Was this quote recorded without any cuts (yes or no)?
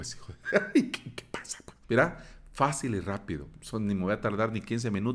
no